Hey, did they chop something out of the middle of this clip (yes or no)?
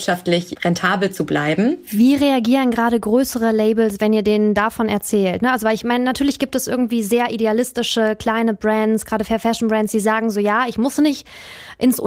no